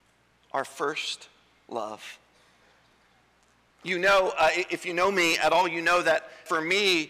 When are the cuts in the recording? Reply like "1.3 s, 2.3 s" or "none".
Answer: none